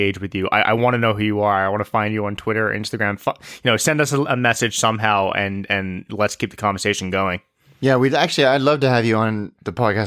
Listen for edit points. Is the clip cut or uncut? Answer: uncut